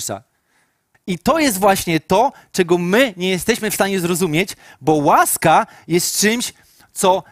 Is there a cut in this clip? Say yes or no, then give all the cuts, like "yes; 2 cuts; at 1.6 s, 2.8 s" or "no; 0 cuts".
yes; 1 cut; at 0.9 s